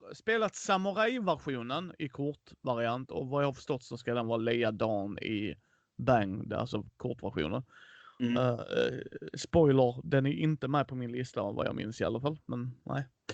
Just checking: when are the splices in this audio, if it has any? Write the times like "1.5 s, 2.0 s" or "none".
none